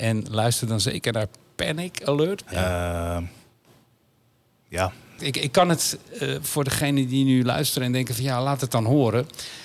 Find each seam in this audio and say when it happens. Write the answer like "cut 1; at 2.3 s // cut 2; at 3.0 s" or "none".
cut 1; at 2.4 s // cut 2; at 5.2 s